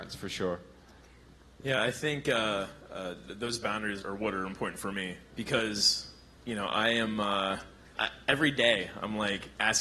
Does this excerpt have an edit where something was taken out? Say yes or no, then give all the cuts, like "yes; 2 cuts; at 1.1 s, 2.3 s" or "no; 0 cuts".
yes; 2 cuts; at 4.0 s, 7.9 s